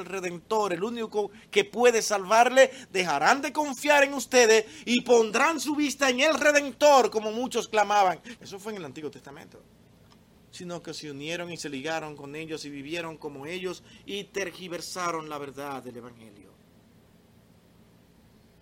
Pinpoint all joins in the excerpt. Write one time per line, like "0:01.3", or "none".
0:08.4
0:10.4